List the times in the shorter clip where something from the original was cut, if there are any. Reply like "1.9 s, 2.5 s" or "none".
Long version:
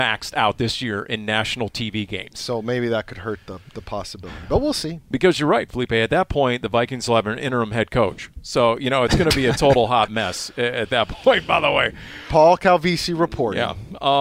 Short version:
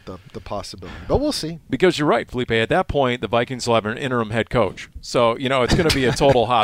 none